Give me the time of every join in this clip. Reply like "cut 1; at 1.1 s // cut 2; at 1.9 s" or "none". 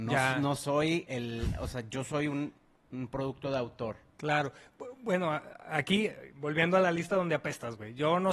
cut 1; at 1.1 s